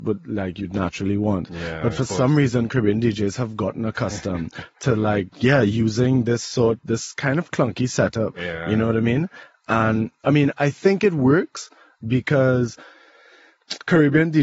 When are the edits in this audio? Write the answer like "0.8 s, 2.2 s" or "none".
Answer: 5.3 s